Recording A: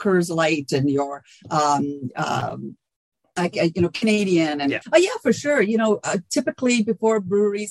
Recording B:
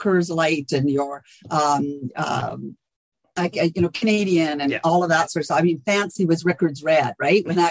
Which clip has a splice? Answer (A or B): A